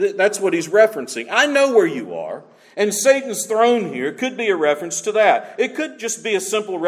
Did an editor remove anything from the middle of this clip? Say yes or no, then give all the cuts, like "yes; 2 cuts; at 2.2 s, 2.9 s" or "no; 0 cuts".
no; 0 cuts